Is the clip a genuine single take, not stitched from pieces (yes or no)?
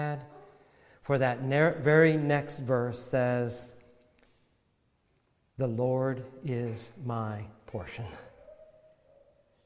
yes